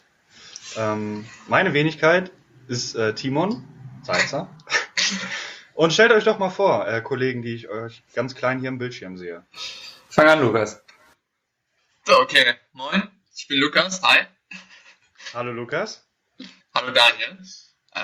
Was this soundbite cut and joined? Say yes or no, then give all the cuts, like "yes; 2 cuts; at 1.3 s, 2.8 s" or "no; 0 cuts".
yes; 1 cut; at 16.6 s